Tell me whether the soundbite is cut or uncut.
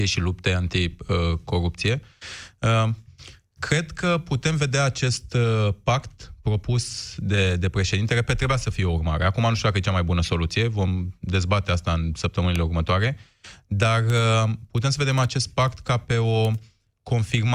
uncut